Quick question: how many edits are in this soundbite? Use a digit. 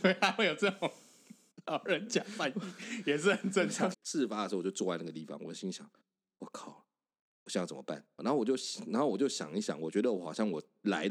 2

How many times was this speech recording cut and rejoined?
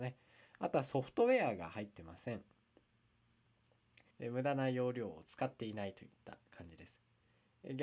1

